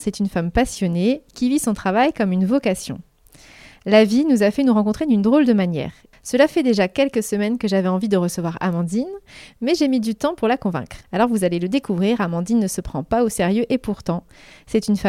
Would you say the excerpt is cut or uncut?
cut